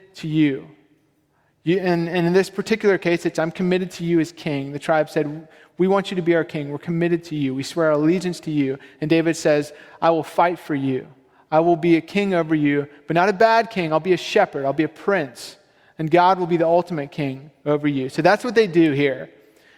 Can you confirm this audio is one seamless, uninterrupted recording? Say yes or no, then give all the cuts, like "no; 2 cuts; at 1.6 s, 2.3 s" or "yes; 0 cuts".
yes; 0 cuts